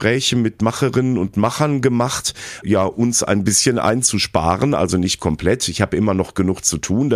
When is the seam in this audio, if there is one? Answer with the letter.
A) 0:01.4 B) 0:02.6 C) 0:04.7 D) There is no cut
B